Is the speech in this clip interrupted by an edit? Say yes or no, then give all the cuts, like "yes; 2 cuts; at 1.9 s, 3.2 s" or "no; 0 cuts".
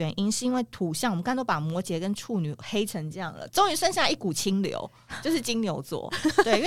yes; 1 cut; at 3.5 s